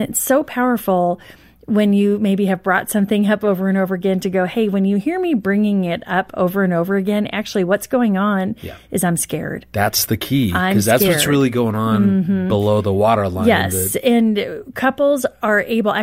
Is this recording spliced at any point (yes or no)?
no